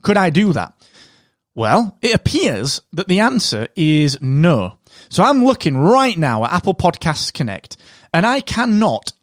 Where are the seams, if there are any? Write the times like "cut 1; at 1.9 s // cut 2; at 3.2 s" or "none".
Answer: none